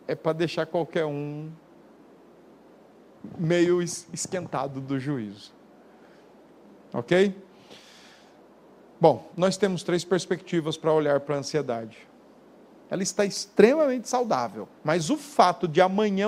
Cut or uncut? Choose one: cut